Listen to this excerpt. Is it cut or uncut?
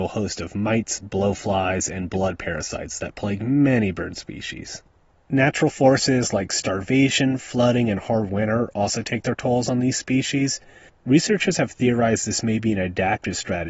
cut